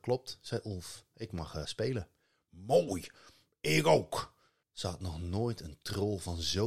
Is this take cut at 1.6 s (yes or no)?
yes